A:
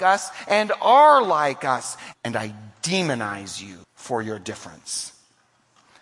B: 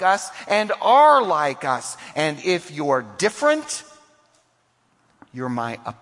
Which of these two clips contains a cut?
A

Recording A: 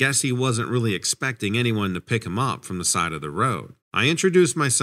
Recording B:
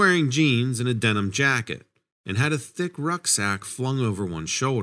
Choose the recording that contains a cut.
A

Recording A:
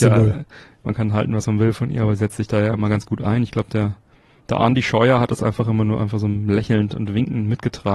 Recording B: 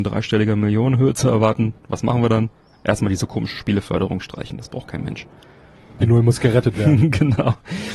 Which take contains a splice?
B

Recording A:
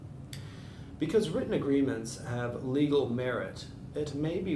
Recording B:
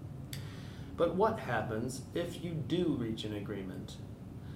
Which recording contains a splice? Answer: B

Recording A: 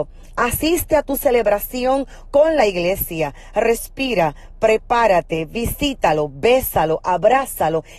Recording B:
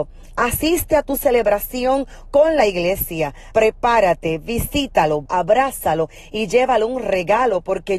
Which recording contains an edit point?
B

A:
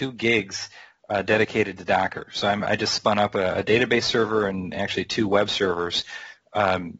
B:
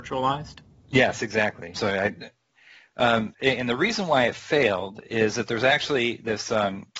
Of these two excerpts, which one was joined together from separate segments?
B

